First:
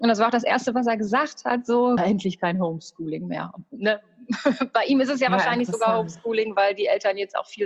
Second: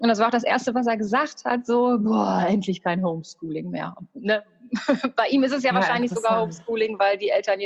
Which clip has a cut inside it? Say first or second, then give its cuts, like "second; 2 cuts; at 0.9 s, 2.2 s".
first; 1 cut; at 2.0 s